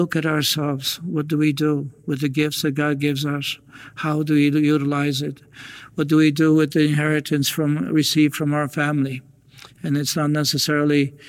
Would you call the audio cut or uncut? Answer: uncut